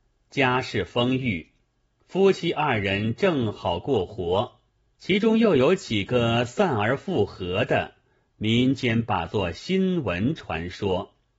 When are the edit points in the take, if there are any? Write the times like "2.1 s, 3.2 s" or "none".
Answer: 4.9 s